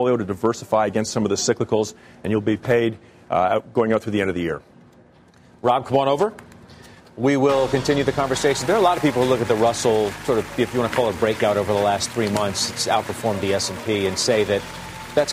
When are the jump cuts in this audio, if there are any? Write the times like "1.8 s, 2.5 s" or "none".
none

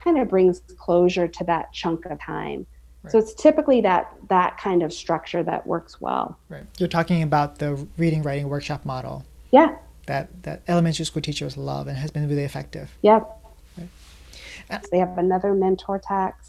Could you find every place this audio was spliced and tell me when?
12.9 s, 14.8 s

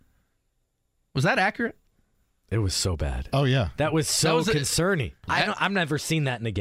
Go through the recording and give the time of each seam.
5.3 s

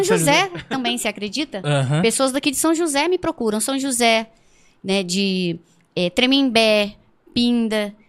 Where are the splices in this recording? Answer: none

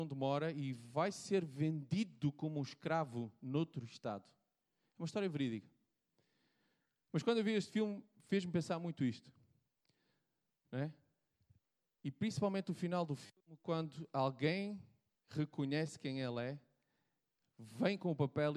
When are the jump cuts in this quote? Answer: none

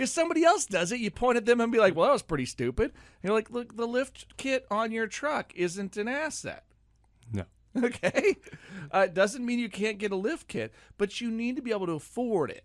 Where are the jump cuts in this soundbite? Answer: none

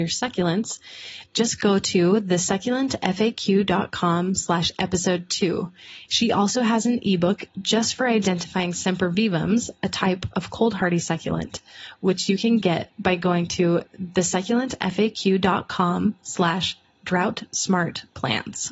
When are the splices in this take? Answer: 6.0 s

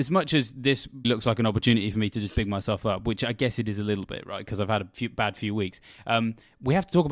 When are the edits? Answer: 1.0 s

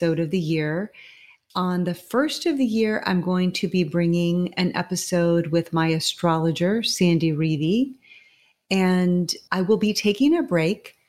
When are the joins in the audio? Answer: none

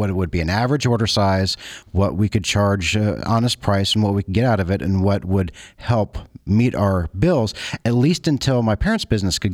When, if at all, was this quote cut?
1.8 s

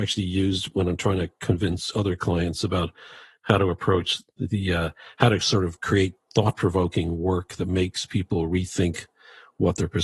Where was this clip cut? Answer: none

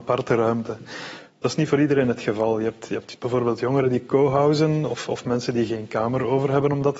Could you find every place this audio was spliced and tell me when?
none

